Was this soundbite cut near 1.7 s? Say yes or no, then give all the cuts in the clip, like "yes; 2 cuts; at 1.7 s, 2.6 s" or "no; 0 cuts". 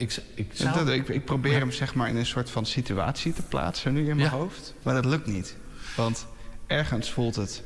no; 1 cut; at 4.8 s